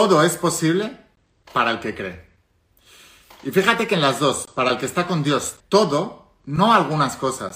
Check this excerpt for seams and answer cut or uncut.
cut